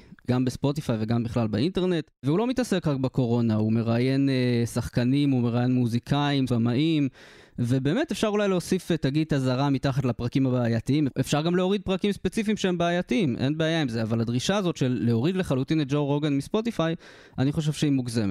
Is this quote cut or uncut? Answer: cut